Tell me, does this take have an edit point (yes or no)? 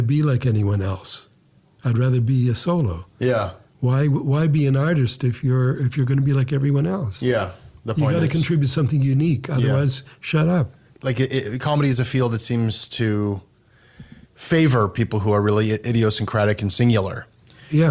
no